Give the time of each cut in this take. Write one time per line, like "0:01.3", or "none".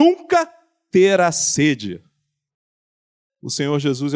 none